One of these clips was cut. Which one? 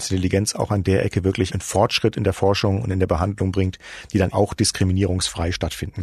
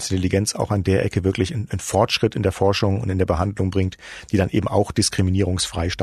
first; 2 cuts; at 1.5 s, 4.3 s

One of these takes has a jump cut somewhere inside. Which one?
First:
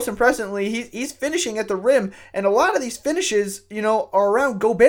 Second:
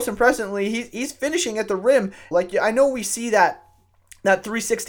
second; 1 cut; at 2.3 s

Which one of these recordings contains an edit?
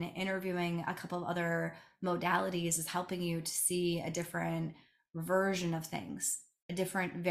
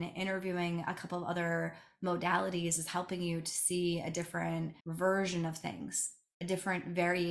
second; 1 cut; at 4.8 s

